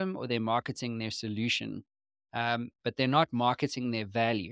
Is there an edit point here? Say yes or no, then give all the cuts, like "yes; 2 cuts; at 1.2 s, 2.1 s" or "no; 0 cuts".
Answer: no; 0 cuts